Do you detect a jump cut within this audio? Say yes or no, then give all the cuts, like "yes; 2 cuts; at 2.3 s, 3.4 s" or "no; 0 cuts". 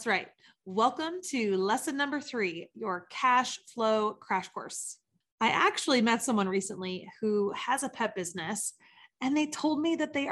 no; 0 cuts